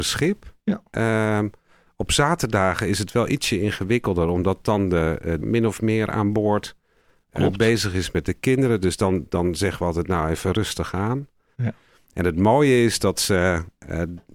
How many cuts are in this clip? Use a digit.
2